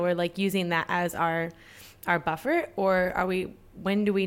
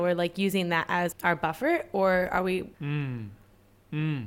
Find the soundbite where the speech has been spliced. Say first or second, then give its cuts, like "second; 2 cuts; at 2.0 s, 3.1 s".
second; 2 cuts; at 1.1 s, 2.7 s